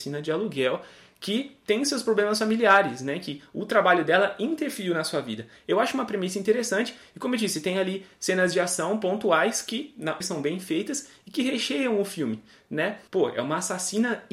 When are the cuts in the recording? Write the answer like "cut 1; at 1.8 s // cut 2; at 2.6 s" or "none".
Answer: cut 1; at 10.2 s // cut 2; at 13.1 s